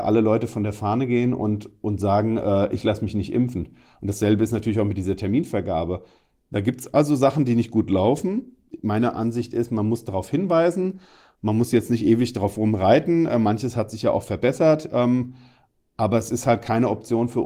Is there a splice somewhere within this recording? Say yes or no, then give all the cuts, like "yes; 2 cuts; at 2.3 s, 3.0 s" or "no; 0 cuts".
no; 0 cuts